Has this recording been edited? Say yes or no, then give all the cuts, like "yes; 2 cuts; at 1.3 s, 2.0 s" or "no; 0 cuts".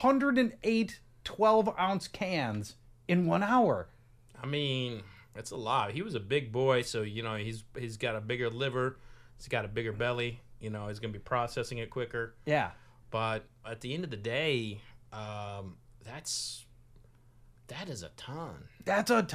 yes; 1 cut; at 13.6 s